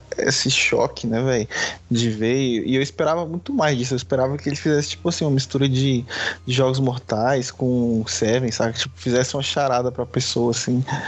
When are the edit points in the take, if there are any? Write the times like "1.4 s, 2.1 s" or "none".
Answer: none